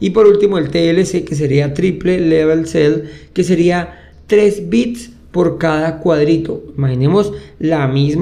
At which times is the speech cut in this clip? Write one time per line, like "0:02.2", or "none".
none